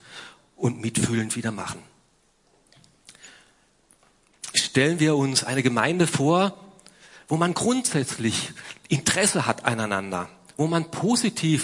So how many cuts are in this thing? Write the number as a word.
zero